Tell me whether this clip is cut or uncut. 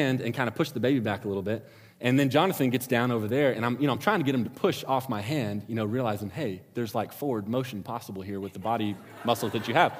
uncut